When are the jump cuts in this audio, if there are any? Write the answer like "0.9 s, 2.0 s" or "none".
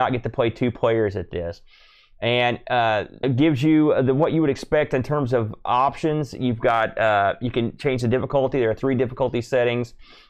3.2 s